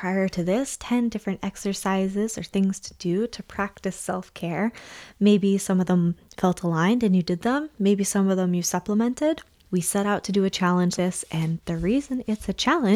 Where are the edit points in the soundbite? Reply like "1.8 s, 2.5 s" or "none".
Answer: 9.7 s, 11.0 s